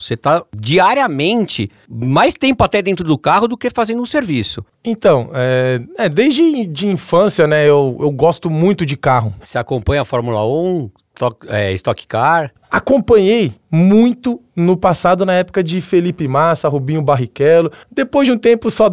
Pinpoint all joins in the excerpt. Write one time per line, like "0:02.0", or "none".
none